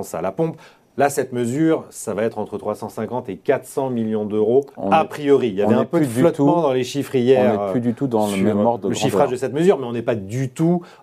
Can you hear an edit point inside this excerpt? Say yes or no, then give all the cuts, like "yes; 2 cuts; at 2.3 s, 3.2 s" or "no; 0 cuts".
yes; 1 cut; at 4.7 s